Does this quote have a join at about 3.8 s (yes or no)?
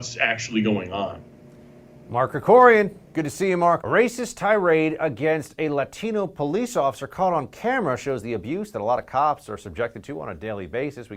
yes